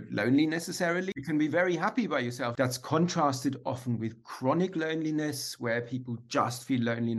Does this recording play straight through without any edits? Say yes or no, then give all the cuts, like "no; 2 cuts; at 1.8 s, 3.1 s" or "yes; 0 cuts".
no; 1 cut; at 2.5 s